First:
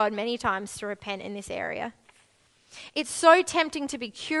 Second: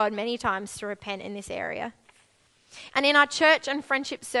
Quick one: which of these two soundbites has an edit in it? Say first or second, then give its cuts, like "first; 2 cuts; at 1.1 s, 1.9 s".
second; 1 cut; at 2.9 s